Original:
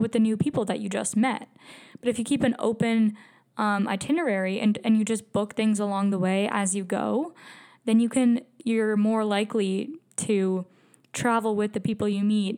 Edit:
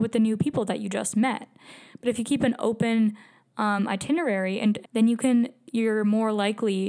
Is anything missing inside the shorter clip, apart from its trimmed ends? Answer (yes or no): yes